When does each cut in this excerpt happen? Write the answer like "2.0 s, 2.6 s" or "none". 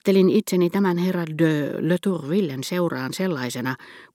none